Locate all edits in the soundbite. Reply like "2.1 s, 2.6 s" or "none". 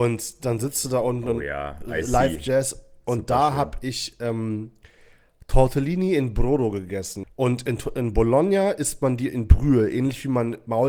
7.2 s